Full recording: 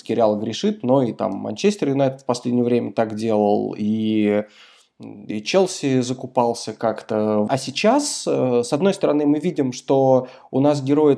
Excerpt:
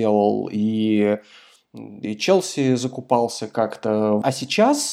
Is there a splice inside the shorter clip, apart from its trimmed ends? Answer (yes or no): no